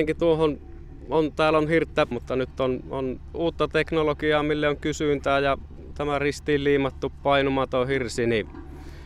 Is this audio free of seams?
no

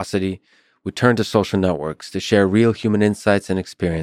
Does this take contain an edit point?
no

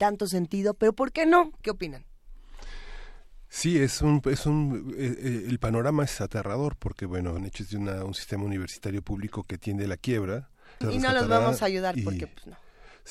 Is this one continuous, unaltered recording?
no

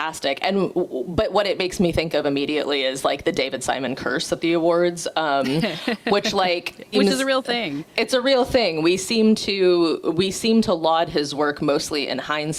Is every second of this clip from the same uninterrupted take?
no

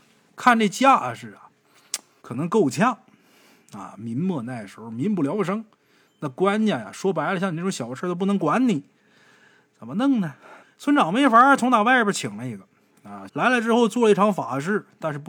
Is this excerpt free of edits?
no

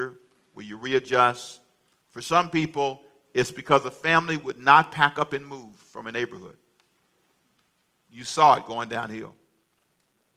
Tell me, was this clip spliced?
no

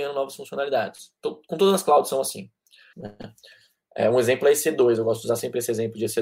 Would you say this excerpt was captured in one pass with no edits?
no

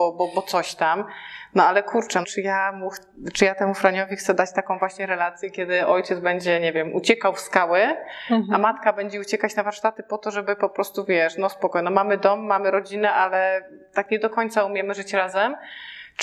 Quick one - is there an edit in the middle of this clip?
yes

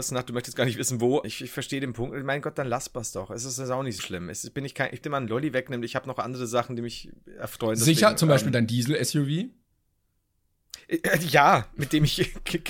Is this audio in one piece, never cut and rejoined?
no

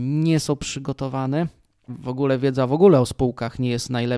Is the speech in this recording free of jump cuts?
no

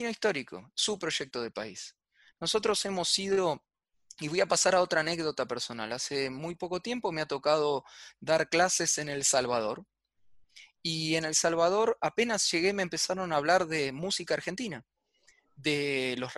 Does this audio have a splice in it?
no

